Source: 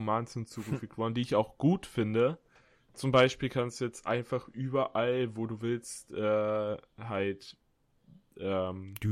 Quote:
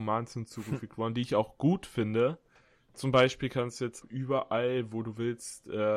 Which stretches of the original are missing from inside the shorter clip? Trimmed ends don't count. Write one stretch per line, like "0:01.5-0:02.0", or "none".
0:04.0-0:04.5